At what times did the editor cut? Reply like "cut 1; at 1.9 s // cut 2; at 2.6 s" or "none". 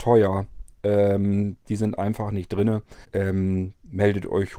cut 1; at 1.6 s // cut 2; at 3.0 s

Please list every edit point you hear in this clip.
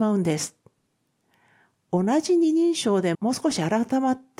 cut 1; at 3.1 s

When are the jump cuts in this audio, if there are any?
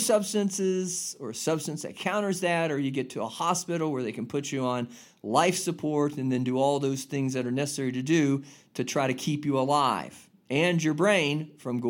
none

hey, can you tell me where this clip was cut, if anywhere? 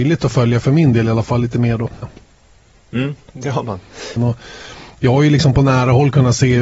cut 1; at 2.0 s // cut 2; at 4.2 s

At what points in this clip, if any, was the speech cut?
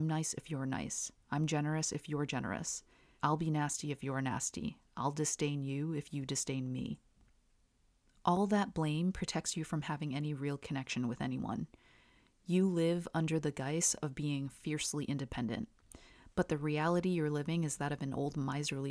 cut 1; at 3.2 s

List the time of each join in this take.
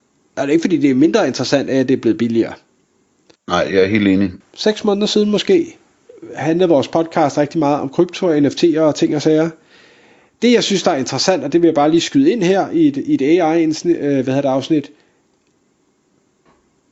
cut 1; at 3.4 s // cut 2; at 4.4 s

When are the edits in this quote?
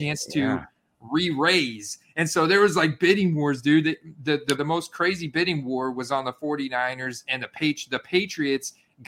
cut 1; at 4.6 s

